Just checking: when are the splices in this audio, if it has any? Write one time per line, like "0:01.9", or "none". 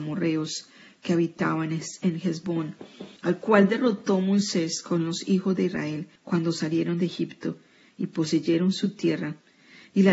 0:03.2
0:06.2